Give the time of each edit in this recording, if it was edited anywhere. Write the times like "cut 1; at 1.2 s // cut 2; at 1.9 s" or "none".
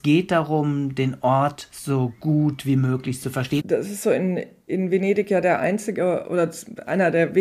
cut 1; at 3.6 s